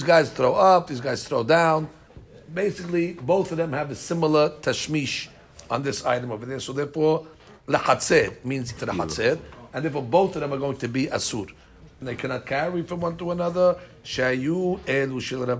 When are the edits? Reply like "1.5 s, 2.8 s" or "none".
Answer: 8.8 s, 12.0 s